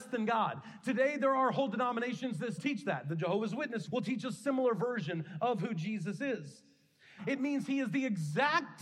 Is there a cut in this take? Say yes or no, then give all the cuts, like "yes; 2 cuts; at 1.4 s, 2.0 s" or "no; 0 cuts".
yes; 3 cuts; at 2.6 s, 3.9 s, 7.2 s